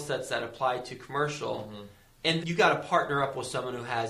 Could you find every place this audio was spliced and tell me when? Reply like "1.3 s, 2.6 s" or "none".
2.4 s